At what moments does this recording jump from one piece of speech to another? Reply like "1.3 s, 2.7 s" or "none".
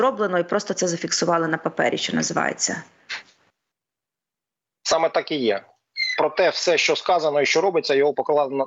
none